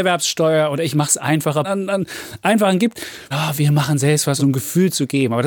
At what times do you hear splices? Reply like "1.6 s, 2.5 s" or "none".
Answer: 1.6 s, 3.3 s, 4.4 s